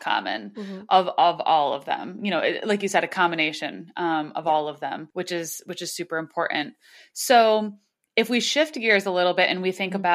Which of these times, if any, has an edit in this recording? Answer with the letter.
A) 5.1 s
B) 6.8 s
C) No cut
A